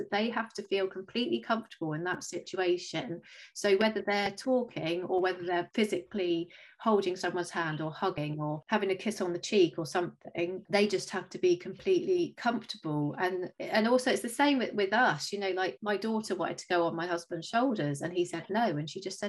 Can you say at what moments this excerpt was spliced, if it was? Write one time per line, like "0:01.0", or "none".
none